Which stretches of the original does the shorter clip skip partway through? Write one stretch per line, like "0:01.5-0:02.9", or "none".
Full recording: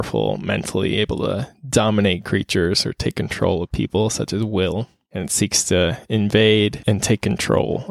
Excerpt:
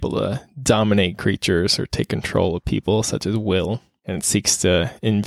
none